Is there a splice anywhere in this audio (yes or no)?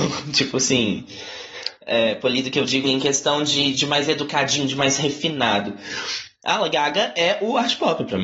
yes